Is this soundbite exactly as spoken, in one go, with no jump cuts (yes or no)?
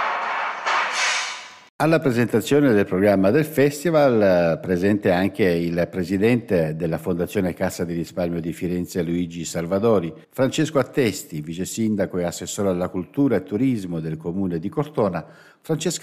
no